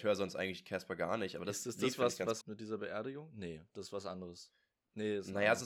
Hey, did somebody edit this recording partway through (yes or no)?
yes